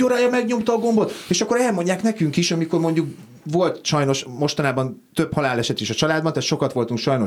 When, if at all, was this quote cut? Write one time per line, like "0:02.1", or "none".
none